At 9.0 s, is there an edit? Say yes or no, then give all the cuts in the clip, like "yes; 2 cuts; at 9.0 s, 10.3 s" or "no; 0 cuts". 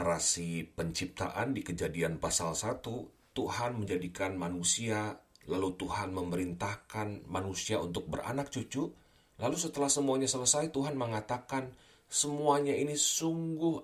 no; 0 cuts